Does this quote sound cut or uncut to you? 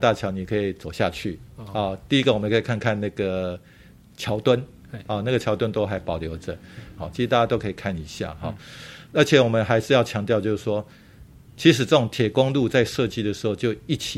cut